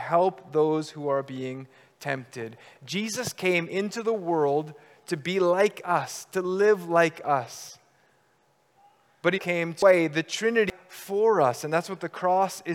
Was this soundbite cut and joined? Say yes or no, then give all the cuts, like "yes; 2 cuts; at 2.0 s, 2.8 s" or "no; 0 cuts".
yes; 1 cut; at 9.4 s